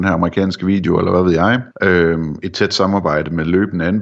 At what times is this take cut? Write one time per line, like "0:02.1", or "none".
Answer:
0:01.7

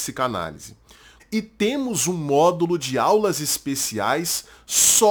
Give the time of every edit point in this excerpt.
0:01.2

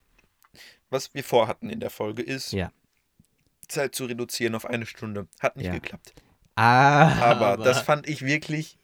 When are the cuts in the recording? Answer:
none

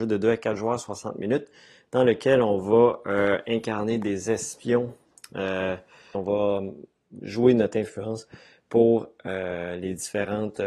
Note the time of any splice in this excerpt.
0:06.1

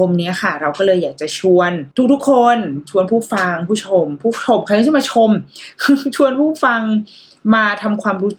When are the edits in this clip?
0:01.9

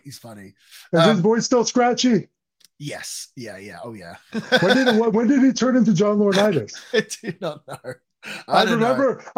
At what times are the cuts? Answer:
0:06.9

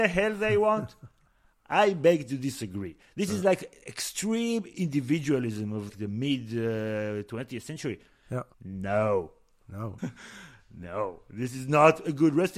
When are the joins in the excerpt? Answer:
0:05.9
0:08.5
0:10.0

